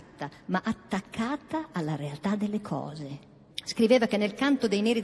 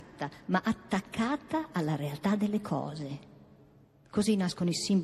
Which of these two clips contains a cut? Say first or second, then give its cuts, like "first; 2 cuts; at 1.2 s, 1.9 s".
first; 1 cut; at 3.5 s